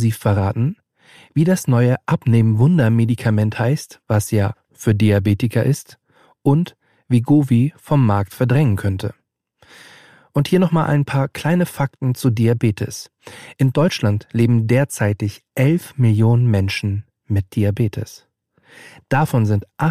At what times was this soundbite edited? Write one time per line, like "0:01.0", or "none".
0:04.0

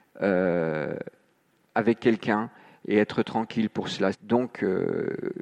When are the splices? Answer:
0:04.1

